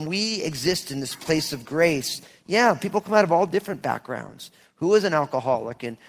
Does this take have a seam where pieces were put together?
no; 0 cuts

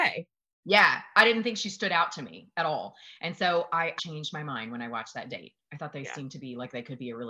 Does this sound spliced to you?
yes; 1 cut; at 4.0 s

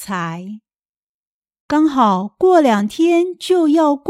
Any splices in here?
yes; 1 cut; at 1.6 s

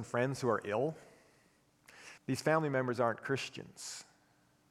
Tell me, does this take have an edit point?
yes; 1 cut; at 2.2 s

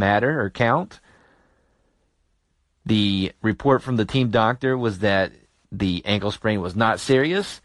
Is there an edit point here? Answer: no; 0 cuts

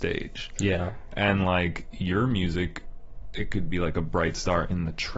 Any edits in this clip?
no; 0 cuts

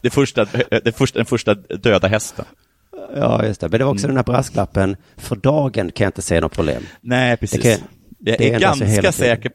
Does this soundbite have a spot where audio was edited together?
no; 0 cuts

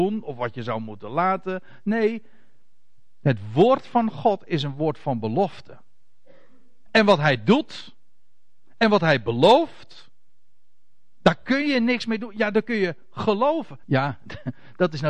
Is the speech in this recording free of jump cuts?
no; 2 cuts; at 6.8 s, 13.8 s

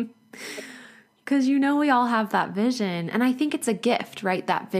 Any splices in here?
no; 0 cuts

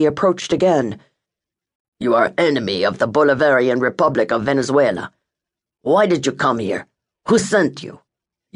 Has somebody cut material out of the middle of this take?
yes; 1 cut; at 1.8 s

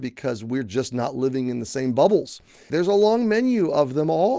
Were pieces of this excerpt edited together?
yes; 1 cut; at 2.7 s

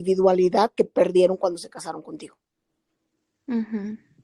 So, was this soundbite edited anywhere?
no; 0 cuts

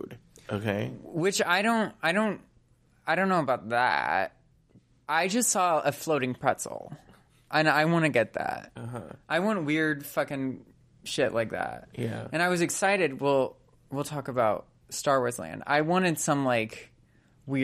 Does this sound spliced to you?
no; 0 cuts

